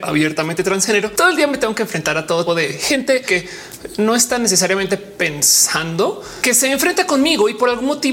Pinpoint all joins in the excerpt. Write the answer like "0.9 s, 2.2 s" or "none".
2.5 s